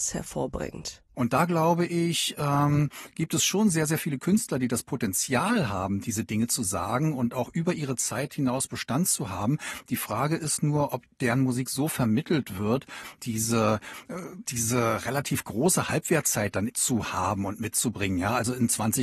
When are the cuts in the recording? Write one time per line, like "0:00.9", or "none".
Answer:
0:01.1
0:13.2
0:16.7